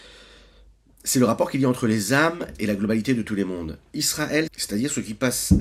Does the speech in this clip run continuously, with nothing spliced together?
no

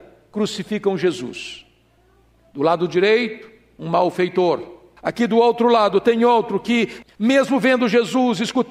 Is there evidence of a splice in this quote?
yes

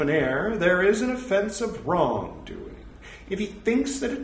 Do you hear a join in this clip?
yes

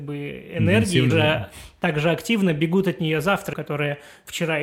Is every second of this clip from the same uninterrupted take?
no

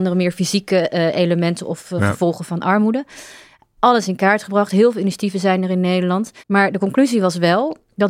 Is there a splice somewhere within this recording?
yes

